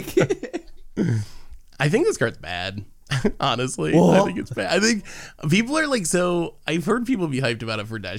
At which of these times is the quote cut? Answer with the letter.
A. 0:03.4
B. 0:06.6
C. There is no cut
C